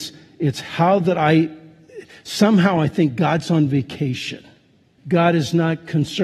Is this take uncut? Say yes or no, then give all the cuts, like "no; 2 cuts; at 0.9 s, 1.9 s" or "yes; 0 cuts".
no; 1 cut; at 5.0 s